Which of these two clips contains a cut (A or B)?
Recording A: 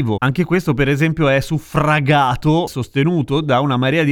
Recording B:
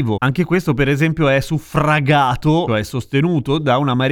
A